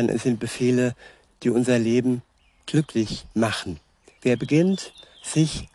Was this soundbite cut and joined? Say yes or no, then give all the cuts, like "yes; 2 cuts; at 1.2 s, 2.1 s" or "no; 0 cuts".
yes; 2 cuts; at 1.3 s, 4.2 s